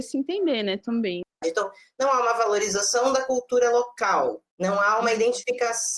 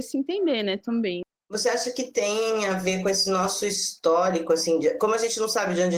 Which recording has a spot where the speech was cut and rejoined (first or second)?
first